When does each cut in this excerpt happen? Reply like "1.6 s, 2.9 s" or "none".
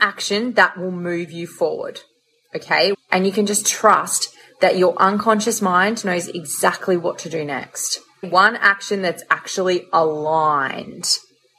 2.9 s, 8.2 s